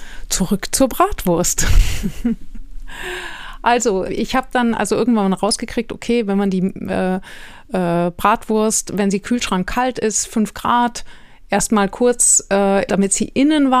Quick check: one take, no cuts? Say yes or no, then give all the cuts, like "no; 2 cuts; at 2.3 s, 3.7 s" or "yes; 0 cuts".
no; 2 cuts; at 4.1 s, 12.9 s